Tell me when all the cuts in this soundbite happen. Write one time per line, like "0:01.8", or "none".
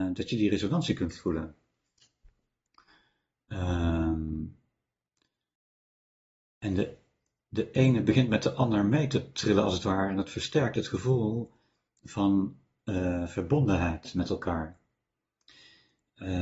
none